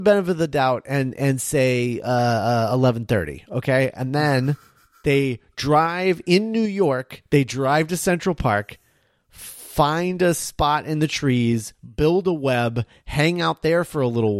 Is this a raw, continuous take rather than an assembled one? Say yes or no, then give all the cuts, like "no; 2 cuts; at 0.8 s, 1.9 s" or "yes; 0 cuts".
yes; 0 cuts